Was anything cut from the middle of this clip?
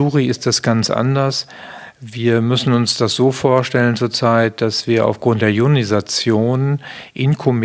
no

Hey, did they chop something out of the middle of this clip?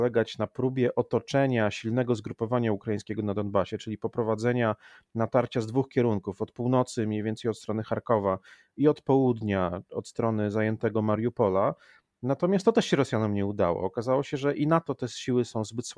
no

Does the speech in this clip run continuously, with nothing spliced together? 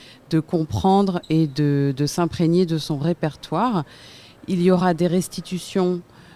yes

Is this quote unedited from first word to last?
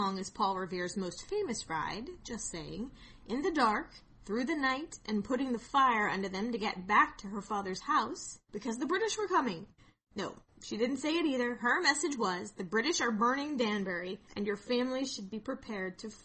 no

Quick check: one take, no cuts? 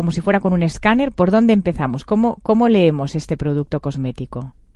yes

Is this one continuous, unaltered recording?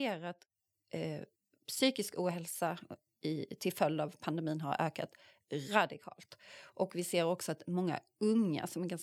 yes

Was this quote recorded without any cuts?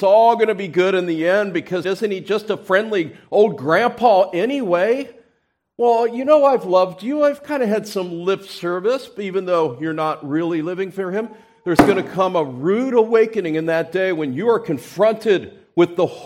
no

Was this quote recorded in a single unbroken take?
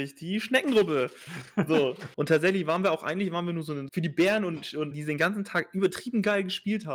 no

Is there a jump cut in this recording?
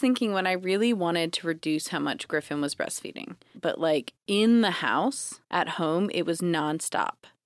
yes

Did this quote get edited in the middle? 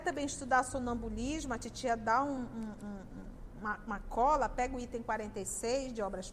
no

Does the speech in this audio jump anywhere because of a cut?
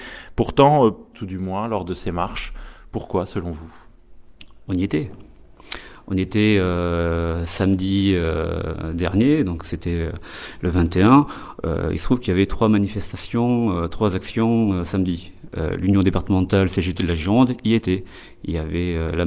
yes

